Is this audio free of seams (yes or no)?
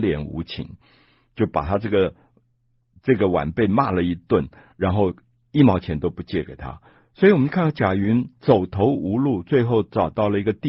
yes